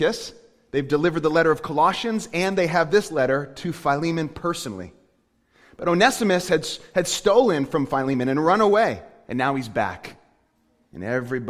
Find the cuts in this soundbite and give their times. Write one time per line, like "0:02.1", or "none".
none